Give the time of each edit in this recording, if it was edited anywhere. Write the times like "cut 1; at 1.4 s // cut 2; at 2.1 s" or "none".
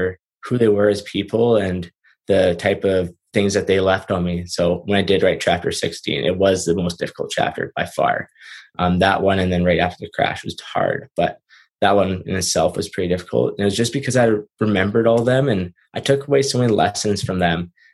none